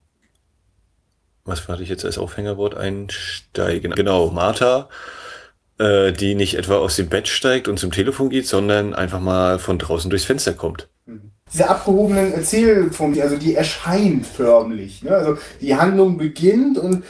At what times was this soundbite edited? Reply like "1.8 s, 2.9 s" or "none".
3.9 s, 11.5 s, 13.1 s